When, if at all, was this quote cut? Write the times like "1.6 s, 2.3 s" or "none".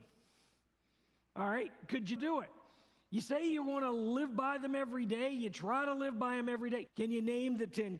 2.2 s, 6.9 s